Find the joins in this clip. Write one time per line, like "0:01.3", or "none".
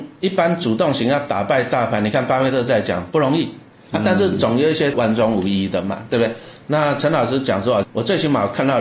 0:03.9
0:04.9
0:07.8